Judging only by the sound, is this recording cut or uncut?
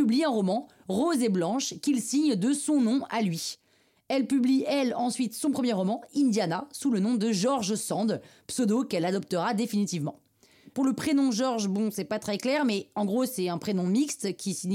uncut